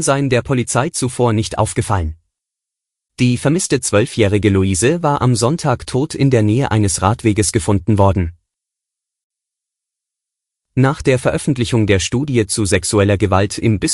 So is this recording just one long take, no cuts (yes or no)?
no